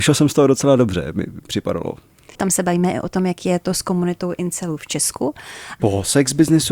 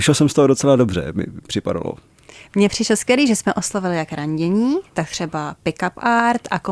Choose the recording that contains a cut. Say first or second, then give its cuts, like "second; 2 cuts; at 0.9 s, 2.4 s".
first; 2 cuts; at 2.3 s, 5.8 s